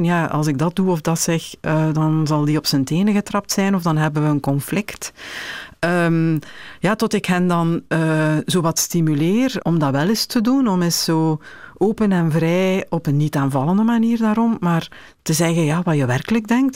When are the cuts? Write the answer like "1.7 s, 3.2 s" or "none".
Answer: 9.6 s